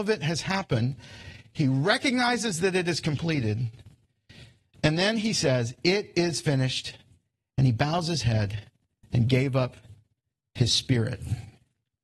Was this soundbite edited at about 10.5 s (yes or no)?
no